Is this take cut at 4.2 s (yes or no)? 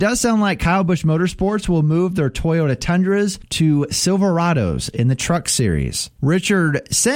no